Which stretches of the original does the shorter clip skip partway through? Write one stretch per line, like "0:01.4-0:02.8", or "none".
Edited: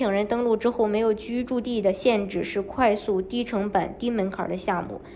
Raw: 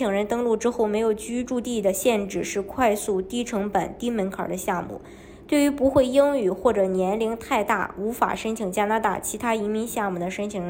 none